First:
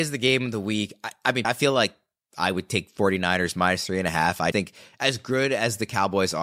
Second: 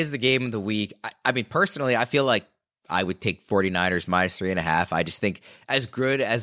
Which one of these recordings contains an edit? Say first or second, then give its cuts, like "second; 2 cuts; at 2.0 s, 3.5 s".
first; 2 cuts; at 1.4 s, 4.5 s